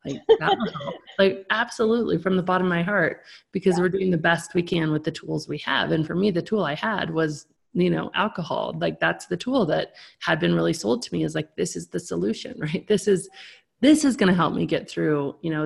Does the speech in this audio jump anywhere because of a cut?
no; 0 cuts

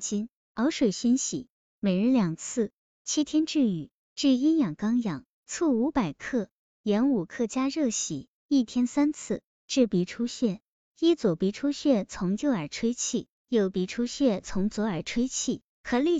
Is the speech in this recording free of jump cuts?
yes; 0 cuts

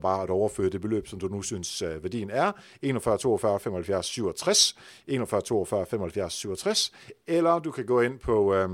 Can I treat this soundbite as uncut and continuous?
yes; 0 cuts

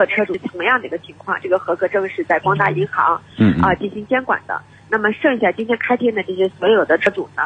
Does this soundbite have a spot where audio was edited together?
no; 0 cuts

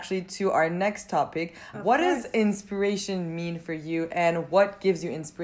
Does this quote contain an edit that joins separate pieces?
yes; 1 cut; at 1.7 s

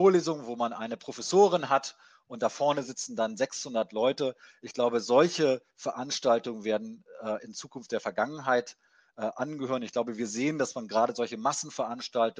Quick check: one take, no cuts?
yes; 0 cuts

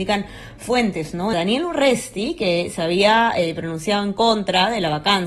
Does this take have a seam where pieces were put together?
yes; 1 cut; at 1.3 s

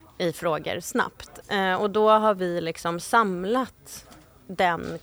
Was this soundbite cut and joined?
yes; 1 cut; at 1.4 s

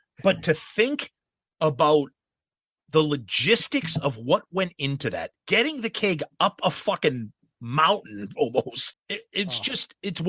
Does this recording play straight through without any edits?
no; 2 cuts; at 5.4 s, 8.9 s

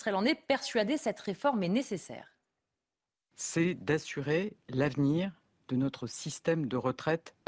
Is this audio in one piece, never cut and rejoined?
yes; 0 cuts

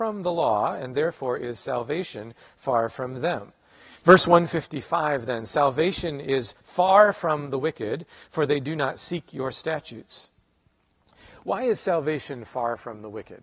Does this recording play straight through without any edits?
no; 1 cut; at 4.0 s

